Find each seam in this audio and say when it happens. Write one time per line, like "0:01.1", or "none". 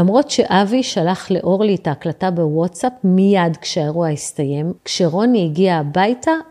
0:04.8